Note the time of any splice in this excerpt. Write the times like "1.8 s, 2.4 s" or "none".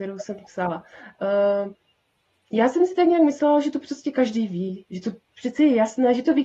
none